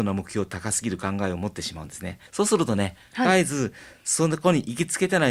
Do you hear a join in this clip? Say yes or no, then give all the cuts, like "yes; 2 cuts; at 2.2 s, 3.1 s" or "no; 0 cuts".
yes; 1 cut; at 2.3 s